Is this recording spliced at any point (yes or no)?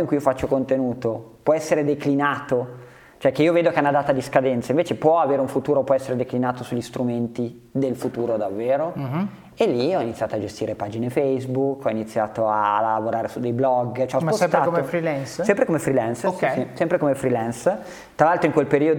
no